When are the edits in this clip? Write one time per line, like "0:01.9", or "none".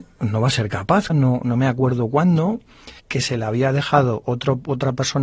0:01.1
0:03.0